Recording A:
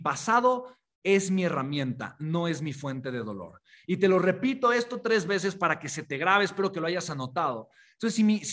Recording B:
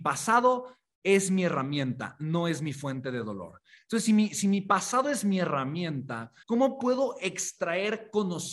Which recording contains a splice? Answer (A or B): B